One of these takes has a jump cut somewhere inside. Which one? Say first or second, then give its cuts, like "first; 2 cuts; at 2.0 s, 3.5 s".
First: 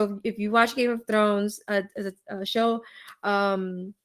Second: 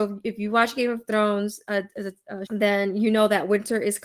second; 1 cut; at 2.5 s